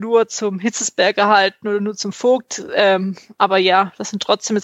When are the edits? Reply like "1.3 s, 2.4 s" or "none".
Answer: none

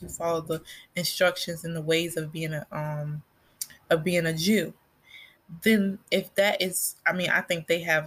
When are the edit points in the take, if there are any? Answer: none

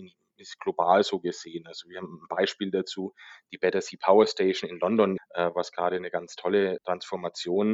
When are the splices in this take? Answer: 5.2 s, 6.8 s

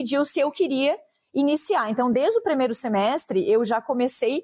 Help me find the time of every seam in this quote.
none

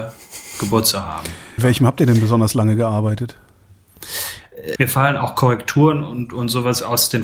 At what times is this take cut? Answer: 1.6 s, 4.7 s

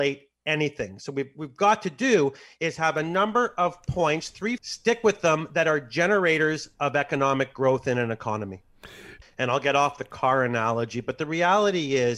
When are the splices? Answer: 4.6 s, 9.2 s

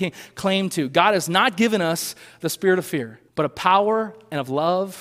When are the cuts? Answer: 3.3 s

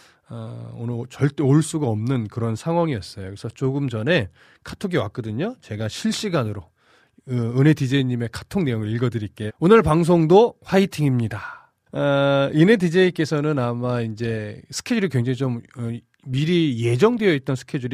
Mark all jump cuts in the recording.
9.5 s, 11.9 s

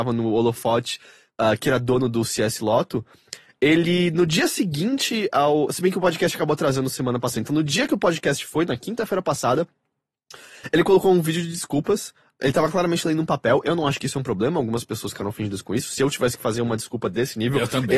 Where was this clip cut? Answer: none

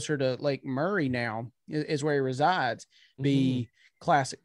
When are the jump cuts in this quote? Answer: 3.2 s

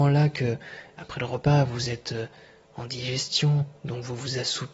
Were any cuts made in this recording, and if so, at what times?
none

